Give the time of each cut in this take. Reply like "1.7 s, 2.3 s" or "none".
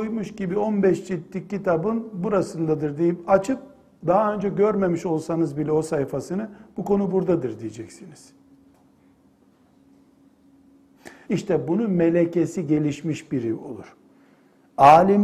11.2 s